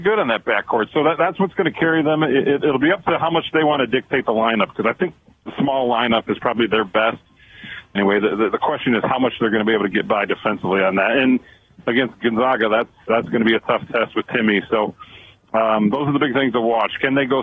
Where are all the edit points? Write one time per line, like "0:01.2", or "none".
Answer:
0:08.0